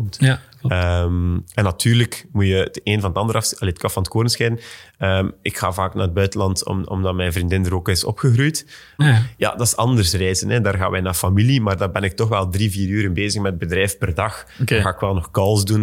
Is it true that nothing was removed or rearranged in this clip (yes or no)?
no